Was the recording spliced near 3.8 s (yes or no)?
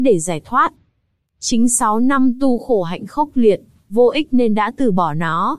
yes